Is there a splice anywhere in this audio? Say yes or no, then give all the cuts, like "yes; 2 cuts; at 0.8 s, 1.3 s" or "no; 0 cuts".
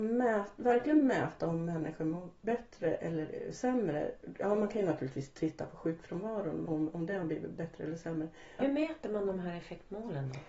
yes; 2 cuts; at 6.6 s, 8.6 s